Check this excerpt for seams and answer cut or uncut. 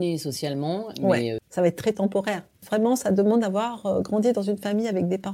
cut